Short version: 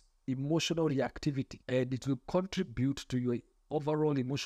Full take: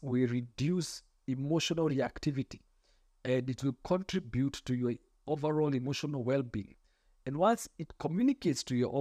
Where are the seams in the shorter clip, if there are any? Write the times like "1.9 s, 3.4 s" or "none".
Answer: 1.6 s